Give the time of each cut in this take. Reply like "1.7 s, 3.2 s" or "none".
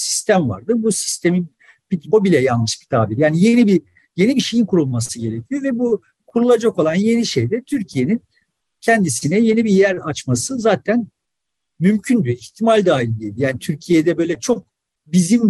2.1 s